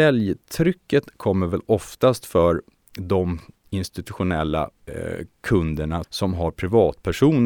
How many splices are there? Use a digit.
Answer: 2